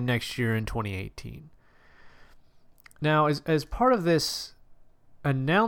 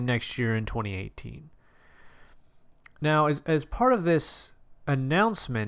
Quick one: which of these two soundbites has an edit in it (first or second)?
second